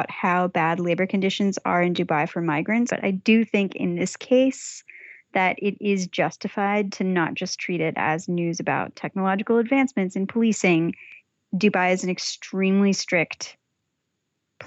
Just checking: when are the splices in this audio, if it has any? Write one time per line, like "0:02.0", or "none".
0:02.9